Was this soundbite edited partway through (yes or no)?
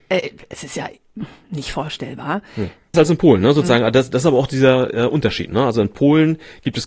yes